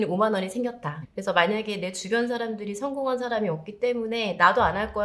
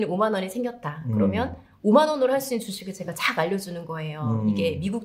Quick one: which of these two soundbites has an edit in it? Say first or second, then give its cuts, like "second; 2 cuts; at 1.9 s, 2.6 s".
first; 1 cut; at 1.0 s